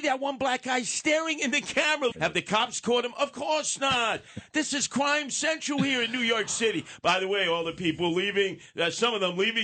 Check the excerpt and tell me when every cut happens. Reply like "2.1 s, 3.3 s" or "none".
2.1 s